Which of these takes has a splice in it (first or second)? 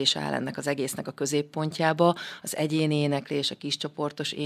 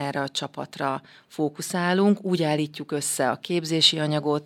first